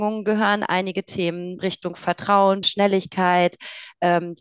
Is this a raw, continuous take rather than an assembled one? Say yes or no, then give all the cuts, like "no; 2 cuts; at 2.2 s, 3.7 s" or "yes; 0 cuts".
no; 2 cuts; at 1.6 s, 2.6 s